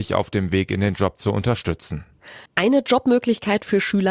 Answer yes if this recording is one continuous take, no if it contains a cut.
no